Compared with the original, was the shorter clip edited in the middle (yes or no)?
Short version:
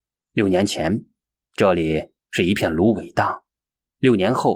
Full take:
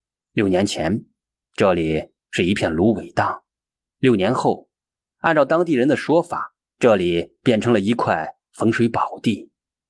no